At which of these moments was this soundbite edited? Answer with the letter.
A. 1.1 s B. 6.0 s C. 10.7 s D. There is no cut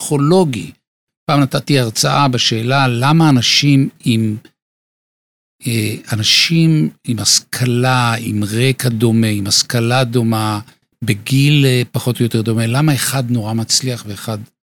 D